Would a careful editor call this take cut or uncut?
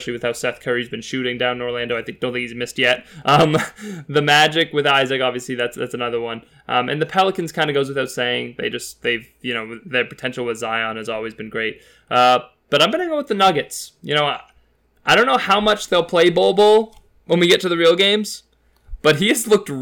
uncut